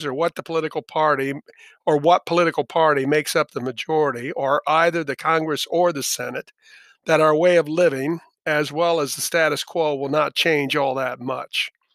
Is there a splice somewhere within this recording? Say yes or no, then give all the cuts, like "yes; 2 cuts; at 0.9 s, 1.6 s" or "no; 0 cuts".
no; 0 cuts